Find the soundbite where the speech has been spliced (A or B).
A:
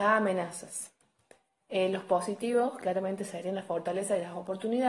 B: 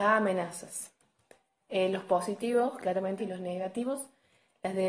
B